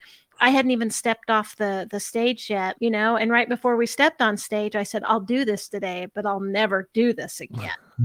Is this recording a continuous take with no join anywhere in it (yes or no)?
no